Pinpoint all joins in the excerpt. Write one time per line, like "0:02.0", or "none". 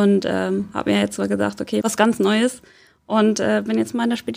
0:01.8